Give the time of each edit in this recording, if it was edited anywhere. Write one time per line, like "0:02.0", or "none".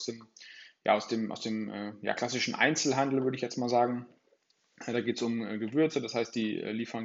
none